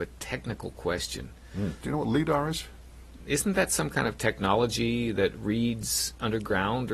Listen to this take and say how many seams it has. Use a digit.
1